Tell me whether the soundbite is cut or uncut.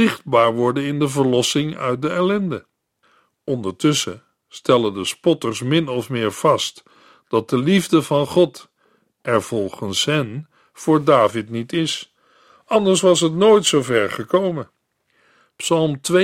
uncut